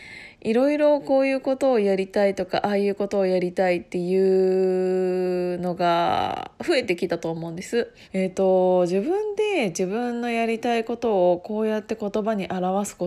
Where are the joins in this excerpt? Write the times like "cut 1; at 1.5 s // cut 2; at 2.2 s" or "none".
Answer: cut 1; at 8.0 s